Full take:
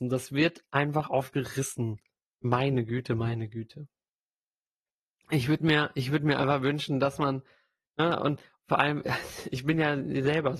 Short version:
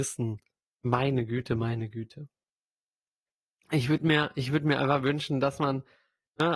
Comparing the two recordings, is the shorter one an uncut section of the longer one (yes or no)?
yes